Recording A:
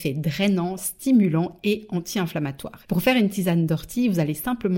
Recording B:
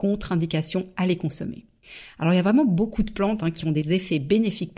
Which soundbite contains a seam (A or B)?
A